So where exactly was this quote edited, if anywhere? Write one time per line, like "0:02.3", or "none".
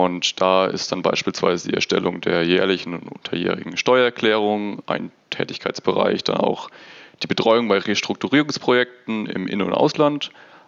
none